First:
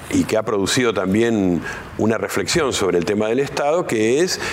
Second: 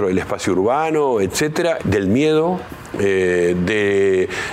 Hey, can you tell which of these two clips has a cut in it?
second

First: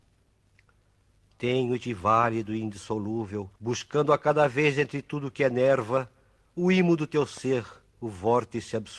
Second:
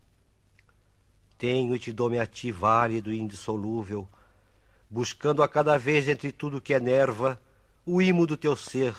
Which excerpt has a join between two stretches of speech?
first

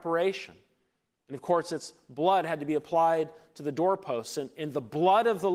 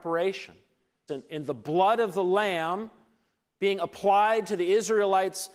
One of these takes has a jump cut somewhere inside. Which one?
second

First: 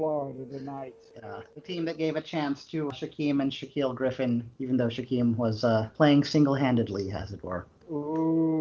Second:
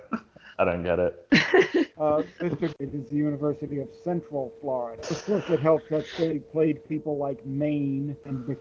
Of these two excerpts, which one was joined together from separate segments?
second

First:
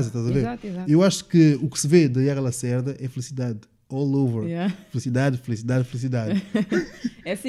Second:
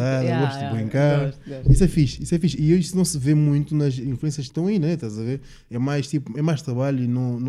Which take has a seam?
second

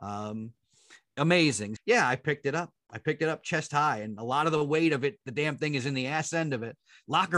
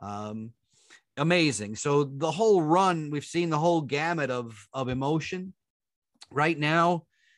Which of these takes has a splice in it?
first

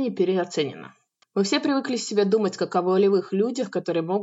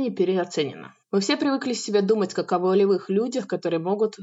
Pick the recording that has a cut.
second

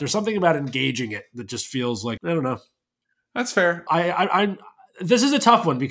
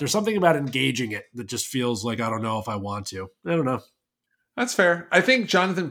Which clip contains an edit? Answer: first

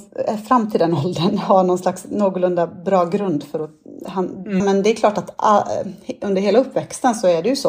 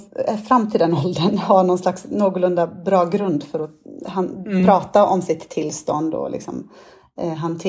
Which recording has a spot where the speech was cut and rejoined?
first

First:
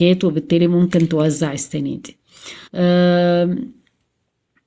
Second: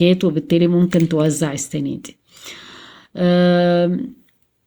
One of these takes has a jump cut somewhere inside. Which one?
first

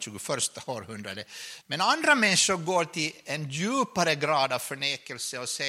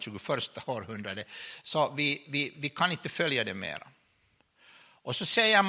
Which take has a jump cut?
first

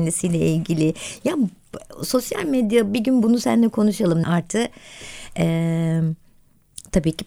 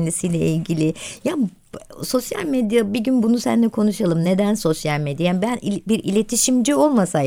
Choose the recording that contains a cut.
first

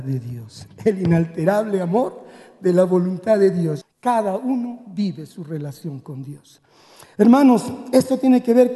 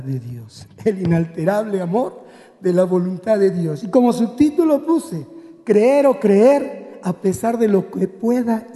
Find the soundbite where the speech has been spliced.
first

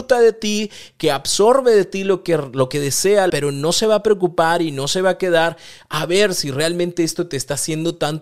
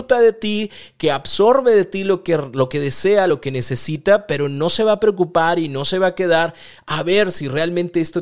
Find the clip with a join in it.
first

